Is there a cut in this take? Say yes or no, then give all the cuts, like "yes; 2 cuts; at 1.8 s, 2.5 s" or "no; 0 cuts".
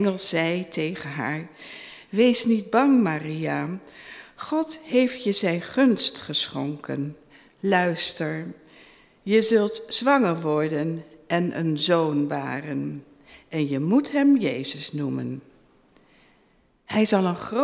no; 0 cuts